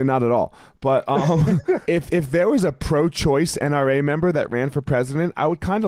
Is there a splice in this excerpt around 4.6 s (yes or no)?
no